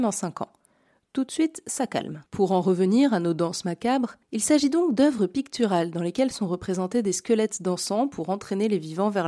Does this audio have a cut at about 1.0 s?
no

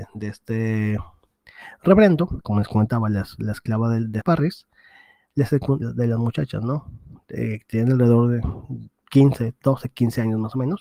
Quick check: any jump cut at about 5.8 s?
yes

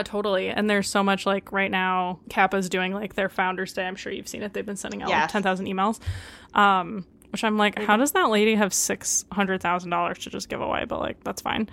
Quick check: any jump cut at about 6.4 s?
no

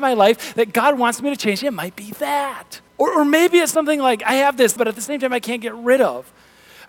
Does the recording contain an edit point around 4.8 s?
yes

